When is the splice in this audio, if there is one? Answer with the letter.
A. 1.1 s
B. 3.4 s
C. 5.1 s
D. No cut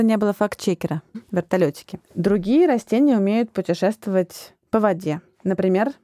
A